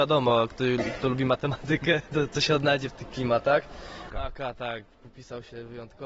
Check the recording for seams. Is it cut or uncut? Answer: cut